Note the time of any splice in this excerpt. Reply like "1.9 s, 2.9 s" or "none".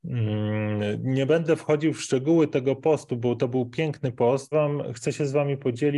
3.4 s, 4.5 s